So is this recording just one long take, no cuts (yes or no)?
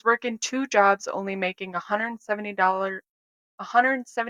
yes